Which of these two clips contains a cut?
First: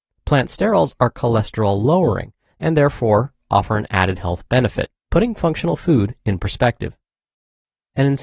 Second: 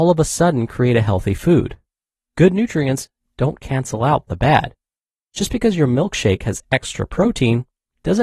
first; 1 cut; at 5.0 s

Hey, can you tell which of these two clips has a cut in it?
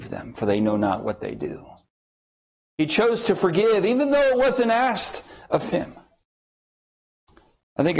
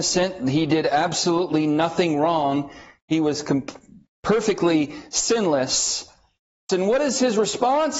second; 1 cut; at 6.7 s

